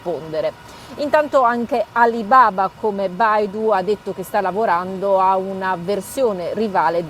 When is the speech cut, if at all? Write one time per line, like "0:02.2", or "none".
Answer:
none